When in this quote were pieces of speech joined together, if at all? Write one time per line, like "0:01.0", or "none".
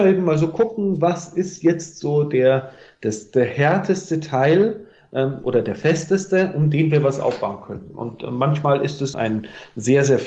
0:09.1